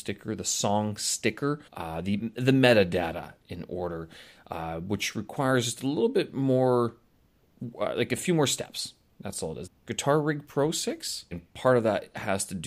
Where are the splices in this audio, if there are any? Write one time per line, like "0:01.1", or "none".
0:01.7
0:09.7
0:11.3